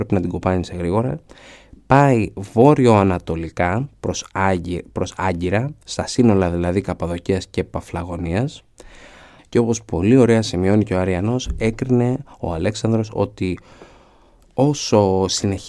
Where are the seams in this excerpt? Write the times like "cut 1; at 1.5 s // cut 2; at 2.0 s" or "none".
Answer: cut 1; at 9.4 s